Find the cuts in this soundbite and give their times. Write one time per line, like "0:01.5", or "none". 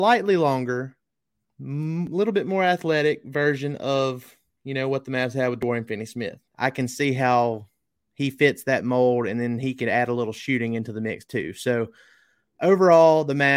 0:06.5